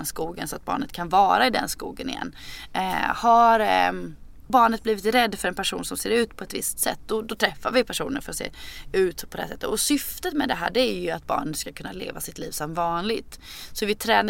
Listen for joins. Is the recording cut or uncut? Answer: uncut